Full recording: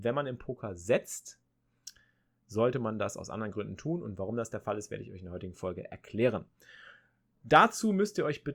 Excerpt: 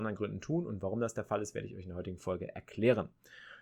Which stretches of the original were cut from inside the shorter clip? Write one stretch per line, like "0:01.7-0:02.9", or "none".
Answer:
none